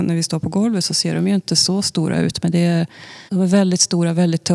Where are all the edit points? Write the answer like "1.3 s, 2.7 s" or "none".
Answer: 3.3 s